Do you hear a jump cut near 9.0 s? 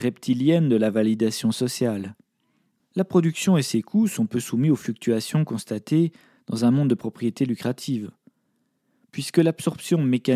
no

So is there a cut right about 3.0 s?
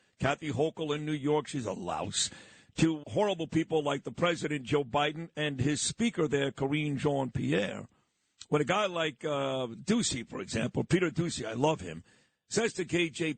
yes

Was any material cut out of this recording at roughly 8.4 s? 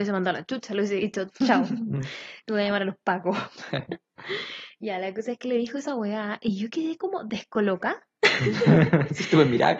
no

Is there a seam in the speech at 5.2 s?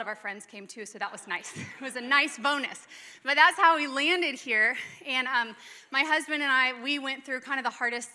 no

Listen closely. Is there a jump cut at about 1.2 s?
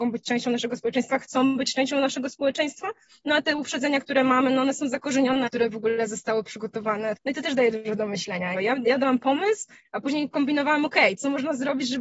no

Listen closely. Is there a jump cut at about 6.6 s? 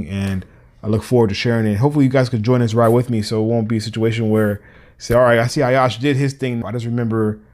yes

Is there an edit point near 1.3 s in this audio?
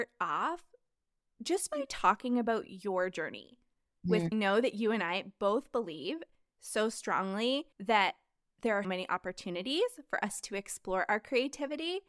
no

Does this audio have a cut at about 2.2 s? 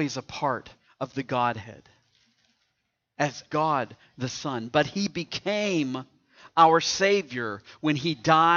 no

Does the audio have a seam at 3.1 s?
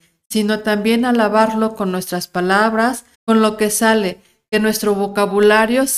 yes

